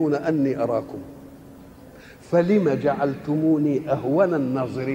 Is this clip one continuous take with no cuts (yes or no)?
yes